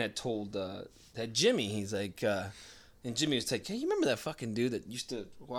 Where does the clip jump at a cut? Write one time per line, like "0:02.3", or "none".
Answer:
0:03.6